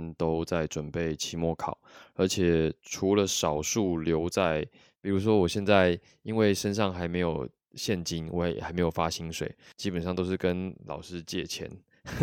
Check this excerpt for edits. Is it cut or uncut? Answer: cut